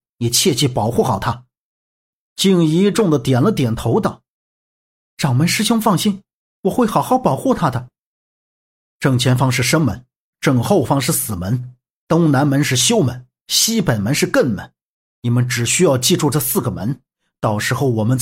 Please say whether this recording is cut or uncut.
cut